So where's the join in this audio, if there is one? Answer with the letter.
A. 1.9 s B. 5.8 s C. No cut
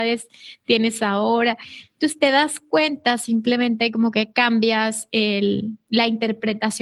C